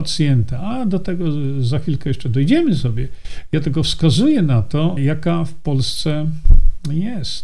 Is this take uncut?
no; 1 cut; at 5.0 s

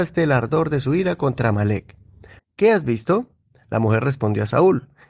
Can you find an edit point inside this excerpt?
yes; 1 cut; at 2.4 s

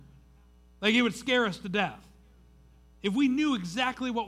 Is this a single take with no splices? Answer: no; 1 cut; at 2.9 s

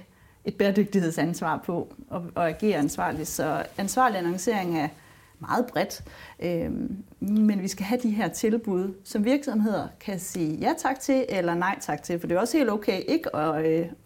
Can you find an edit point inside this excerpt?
no; 0 cuts

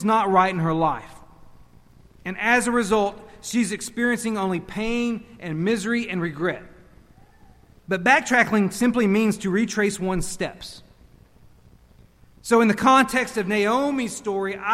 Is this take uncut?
no; 1 cut; at 7.7 s

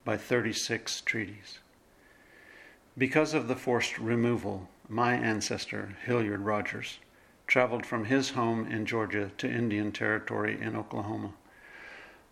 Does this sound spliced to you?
no; 0 cuts

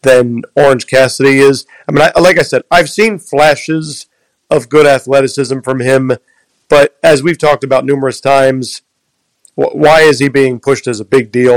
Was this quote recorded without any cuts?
yes; 0 cuts

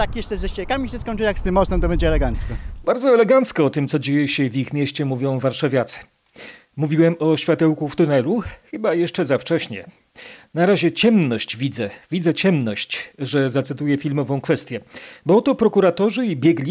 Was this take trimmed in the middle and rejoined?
no; 0 cuts

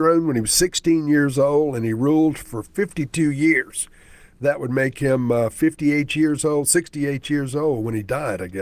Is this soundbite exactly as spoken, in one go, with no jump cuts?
yes; 0 cuts

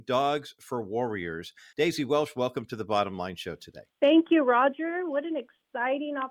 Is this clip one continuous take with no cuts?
no; 2 cuts; at 1.7 s, 3.9 s

